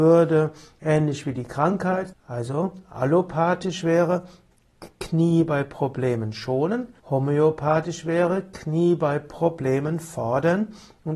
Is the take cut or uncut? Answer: cut